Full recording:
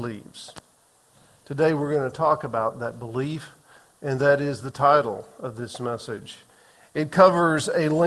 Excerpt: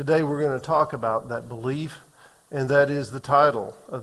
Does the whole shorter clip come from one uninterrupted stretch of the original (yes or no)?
yes